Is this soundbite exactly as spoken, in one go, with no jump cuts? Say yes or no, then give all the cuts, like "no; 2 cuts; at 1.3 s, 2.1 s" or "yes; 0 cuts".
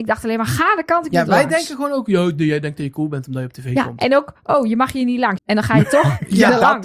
no; 1 cut; at 5.4 s